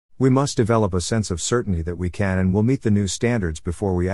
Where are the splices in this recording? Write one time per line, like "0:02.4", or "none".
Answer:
none

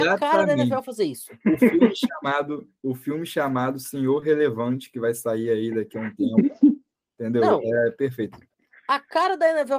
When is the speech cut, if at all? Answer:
none

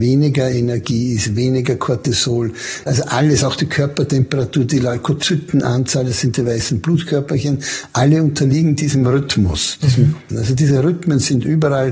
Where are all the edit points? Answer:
0:02.9
0:10.3

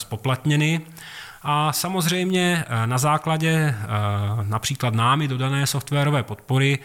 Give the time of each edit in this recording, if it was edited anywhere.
none

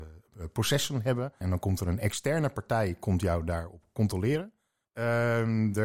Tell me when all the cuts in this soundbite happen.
0:01.4
0:04.8

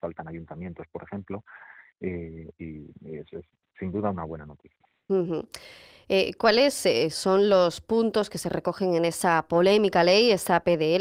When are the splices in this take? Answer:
none

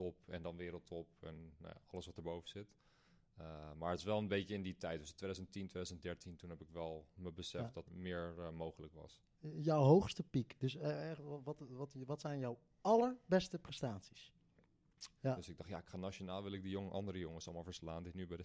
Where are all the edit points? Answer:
0:07.8
0:15.2

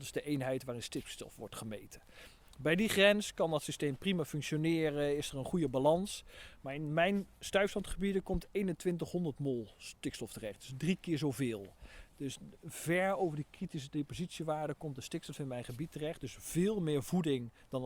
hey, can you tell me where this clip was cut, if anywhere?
none

